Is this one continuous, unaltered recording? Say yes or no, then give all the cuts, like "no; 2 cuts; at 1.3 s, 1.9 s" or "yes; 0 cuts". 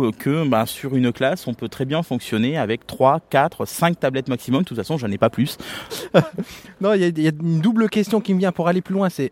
no; 1 cut; at 5.9 s